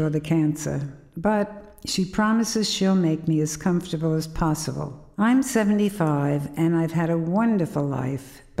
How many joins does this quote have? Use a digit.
1